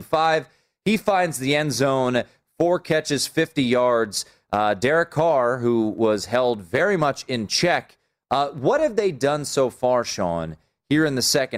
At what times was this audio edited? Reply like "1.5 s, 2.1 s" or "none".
none